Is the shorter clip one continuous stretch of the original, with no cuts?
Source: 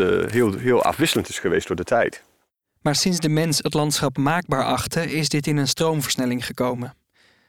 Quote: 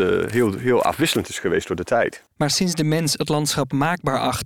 no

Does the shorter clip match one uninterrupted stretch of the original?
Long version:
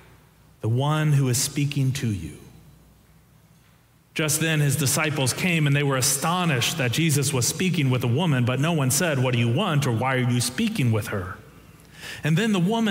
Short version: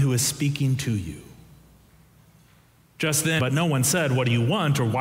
no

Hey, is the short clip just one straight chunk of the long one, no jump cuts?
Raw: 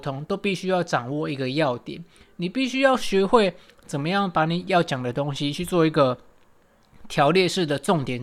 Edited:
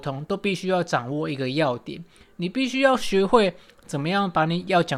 yes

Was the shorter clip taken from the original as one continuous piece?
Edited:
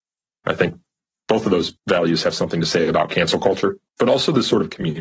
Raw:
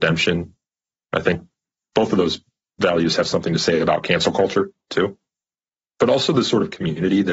no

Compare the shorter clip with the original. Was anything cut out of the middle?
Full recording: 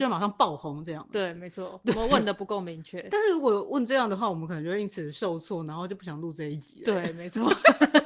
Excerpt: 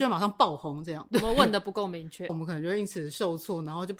yes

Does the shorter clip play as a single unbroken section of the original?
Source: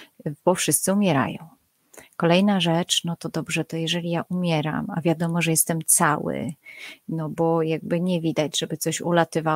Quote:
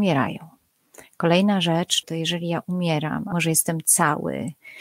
no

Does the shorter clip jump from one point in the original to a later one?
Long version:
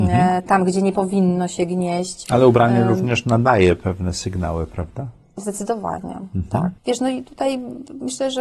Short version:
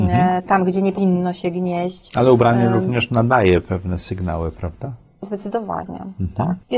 yes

